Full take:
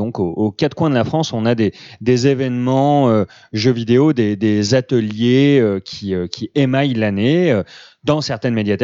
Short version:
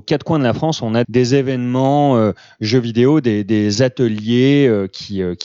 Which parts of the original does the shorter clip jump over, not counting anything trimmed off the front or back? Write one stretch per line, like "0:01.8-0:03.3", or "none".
0:01.6-0:02.0